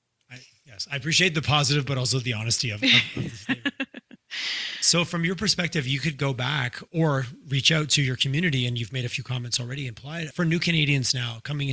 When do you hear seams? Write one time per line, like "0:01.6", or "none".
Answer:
0:06.9
0:10.3